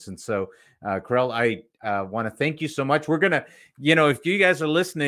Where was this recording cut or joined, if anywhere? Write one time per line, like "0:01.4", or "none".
0:01.8